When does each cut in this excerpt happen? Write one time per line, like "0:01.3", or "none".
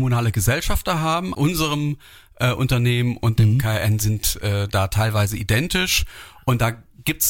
0:01.3